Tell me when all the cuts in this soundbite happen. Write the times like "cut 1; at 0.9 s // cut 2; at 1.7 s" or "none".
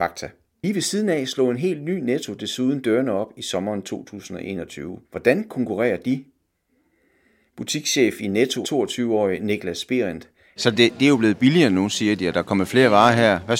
cut 1; at 5.0 s // cut 2; at 8.6 s // cut 3; at 10.6 s